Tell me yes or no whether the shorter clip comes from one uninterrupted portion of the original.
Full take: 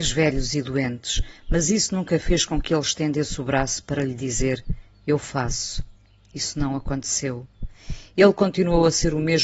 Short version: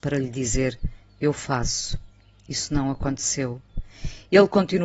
yes